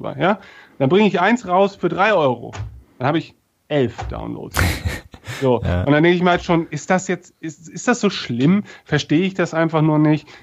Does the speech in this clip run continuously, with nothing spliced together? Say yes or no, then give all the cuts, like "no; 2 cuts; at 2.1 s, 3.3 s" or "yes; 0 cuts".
yes; 0 cuts